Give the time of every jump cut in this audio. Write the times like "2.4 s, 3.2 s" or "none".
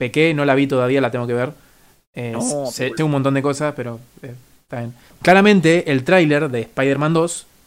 3.0 s, 5.1 s